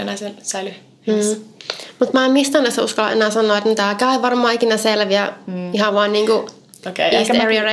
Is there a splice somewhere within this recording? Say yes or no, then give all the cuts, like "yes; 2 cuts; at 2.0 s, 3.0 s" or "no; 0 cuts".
no; 0 cuts